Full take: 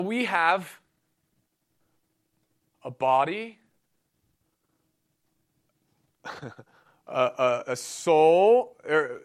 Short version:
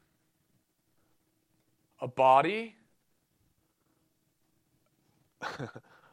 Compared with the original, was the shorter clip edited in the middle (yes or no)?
no